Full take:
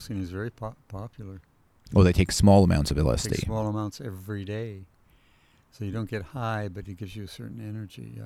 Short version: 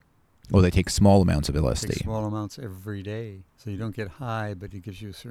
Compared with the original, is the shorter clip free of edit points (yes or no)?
no